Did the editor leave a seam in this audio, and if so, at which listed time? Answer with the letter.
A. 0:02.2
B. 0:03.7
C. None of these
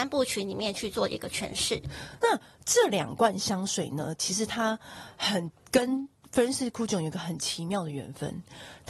A